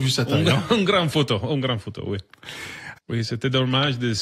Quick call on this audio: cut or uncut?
cut